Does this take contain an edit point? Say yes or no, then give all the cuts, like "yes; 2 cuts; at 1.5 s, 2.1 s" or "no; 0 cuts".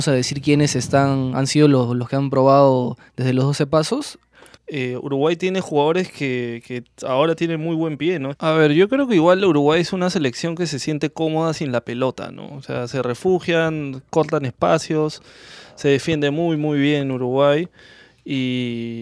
yes; 2 cuts; at 4.5 s, 8.3 s